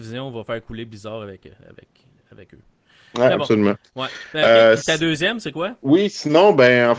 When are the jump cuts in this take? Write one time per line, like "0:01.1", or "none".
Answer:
none